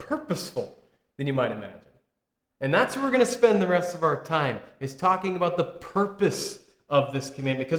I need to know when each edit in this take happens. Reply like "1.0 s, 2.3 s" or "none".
none